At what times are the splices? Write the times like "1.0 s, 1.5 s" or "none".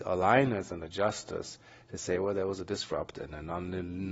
none